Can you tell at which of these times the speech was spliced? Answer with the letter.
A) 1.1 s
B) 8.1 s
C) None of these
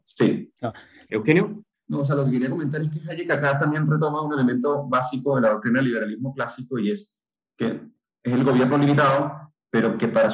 A